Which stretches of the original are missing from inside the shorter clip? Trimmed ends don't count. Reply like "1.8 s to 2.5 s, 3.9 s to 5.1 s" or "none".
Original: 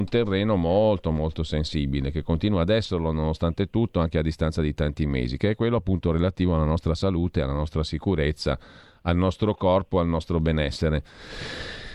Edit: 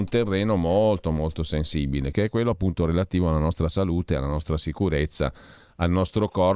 2.1 s to 5.4 s